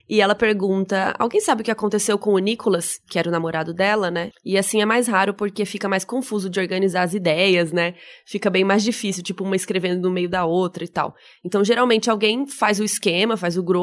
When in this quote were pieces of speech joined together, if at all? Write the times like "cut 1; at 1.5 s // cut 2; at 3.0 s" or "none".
cut 1; at 4.3 s